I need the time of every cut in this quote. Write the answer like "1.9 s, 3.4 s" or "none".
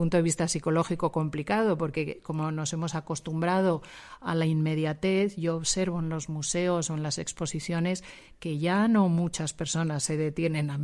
none